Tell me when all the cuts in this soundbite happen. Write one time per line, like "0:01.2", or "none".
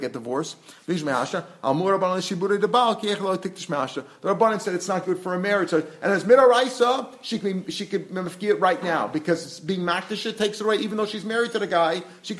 none